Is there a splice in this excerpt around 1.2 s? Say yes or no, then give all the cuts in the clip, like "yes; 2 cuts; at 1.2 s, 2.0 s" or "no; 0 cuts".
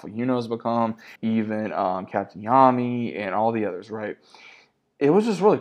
yes; 1 cut; at 1.2 s